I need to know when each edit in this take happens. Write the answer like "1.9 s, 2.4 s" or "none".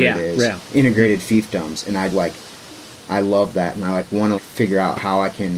2.1 s, 4.3 s

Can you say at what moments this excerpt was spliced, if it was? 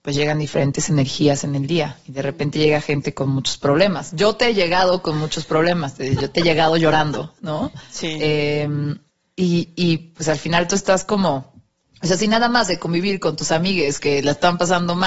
none

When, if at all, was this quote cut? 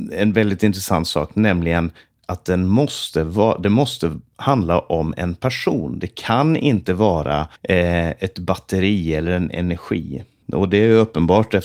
6.0 s, 7.6 s, 10.4 s

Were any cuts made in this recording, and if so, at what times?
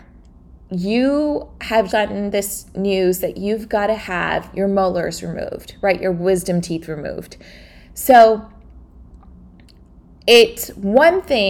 1.9 s

